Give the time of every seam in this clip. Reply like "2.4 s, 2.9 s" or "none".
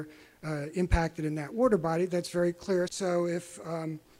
2.9 s